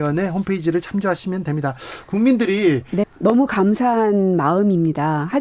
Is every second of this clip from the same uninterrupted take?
no; 1 cut; at 3.0 s

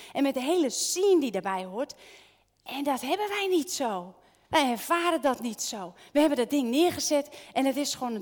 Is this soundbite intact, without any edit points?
yes; 0 cuts

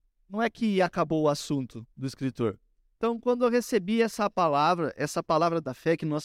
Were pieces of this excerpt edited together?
yes; 1 cut; at 3.0 s

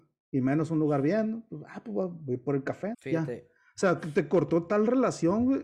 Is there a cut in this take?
yes; 1 cut; at 2.9 s

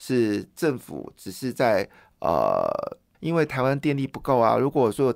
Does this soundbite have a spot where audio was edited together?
yes; 1 cut; at 3.1 s

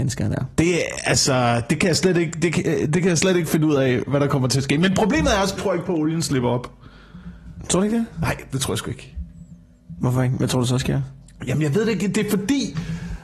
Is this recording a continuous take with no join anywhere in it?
no; 1 cut; at 5.5 s

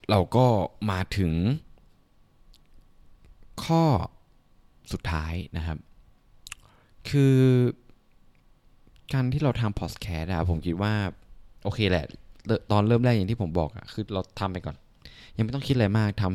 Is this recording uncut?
yes; 0 cuts

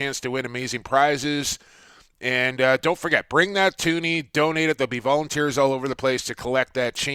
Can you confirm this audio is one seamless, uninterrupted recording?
yes; 0 cuts

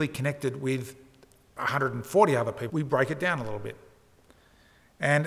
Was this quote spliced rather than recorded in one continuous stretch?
yes; 1 cut; at 2.7 s

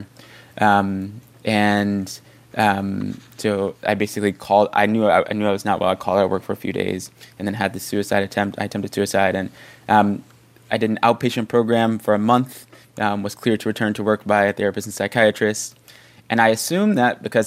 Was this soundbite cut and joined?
no; 0 cuts

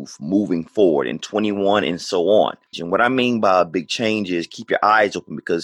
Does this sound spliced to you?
yes; 1 cut; at 2.7 s

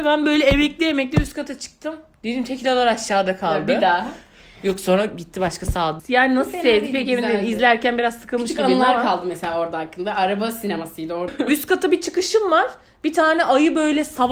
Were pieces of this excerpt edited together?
yes; 2 cuts; at 6.0 s, 11.3 s

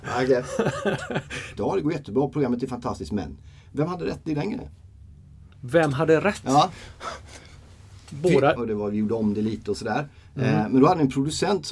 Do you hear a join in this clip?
yes; 2 cuts; at 1.6 s, 8.6 s

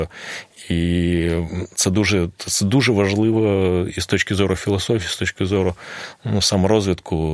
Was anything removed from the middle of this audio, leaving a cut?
no; 0 cuts

